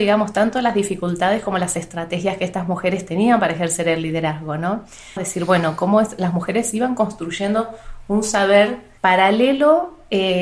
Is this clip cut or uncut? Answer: cut